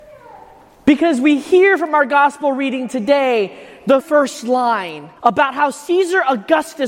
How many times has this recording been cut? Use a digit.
2